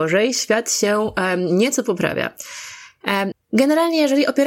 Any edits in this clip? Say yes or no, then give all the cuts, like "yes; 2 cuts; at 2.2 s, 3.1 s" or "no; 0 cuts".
yes; 1 cut; at 3.3 s